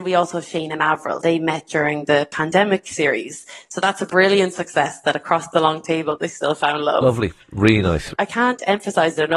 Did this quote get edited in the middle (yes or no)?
yes